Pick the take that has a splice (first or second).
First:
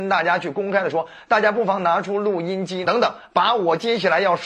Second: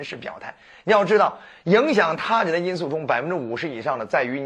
first